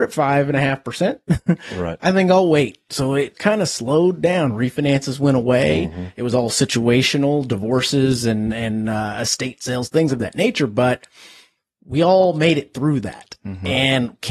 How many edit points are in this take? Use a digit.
1